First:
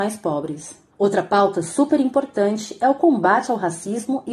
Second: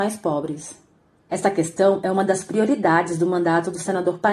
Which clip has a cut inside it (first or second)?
first